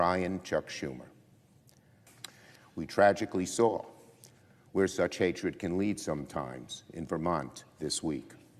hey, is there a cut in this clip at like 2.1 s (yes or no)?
yes